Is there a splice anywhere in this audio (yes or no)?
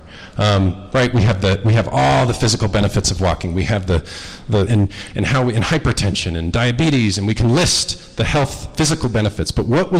yes